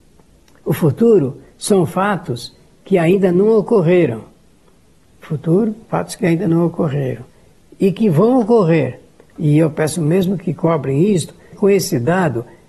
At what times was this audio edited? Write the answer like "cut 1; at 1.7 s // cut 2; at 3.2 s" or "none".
cut 1; at 9.3 s // cut 2; at 11.5 s